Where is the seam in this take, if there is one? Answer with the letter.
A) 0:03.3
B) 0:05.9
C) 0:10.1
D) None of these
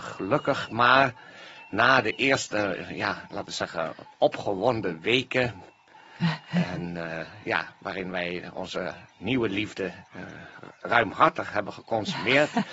C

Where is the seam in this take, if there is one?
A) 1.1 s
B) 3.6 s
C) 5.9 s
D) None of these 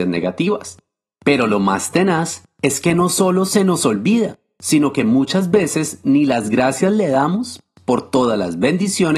D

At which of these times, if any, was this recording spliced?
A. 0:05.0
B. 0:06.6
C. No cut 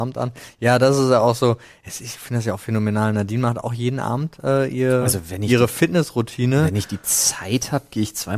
C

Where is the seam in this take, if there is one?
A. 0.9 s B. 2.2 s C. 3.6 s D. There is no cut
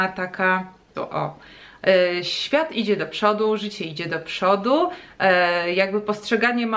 A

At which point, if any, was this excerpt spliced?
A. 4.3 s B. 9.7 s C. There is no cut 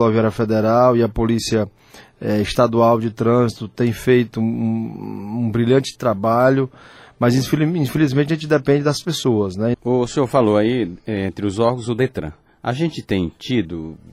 B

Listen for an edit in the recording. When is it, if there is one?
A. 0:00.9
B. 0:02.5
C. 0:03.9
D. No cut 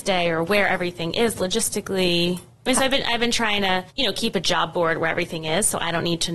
C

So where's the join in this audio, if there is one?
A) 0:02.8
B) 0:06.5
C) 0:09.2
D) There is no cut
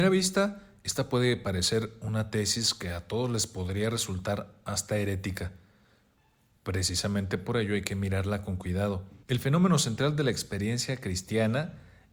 C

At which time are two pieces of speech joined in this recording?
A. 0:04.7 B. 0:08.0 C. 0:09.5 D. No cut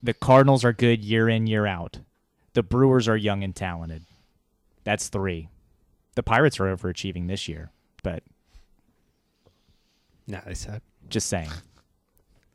B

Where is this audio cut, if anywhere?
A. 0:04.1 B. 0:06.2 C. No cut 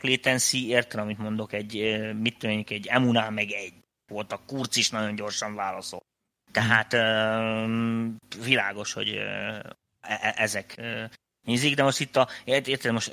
A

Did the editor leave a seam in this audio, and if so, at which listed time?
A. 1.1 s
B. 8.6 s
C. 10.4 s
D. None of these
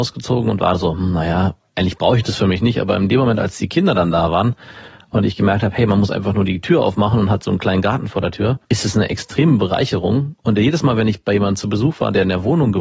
B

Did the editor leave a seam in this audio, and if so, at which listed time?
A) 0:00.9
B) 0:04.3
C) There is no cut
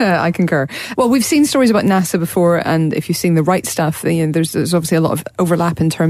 A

